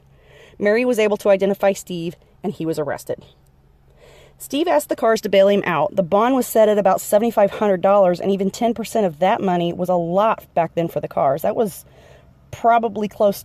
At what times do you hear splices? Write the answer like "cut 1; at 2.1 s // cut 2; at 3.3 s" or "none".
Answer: none